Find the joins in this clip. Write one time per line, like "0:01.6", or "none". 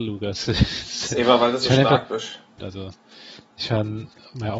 0:02.6